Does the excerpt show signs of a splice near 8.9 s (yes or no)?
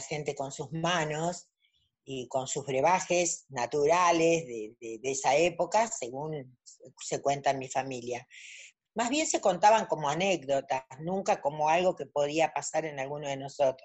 yes